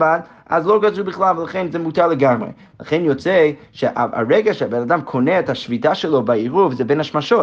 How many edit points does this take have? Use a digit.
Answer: 0